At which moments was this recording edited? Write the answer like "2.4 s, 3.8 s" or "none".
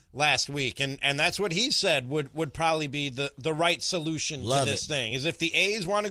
none